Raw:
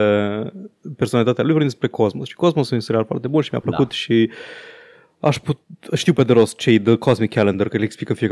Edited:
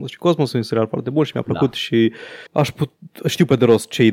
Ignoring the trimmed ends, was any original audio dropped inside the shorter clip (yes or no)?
yes